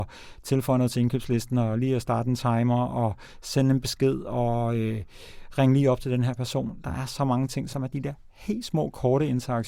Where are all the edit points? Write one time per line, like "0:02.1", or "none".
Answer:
0:07.7